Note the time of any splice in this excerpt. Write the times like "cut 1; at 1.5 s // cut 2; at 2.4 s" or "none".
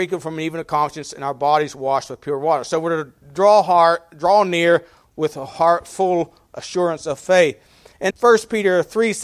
cut 1; at 8.1 s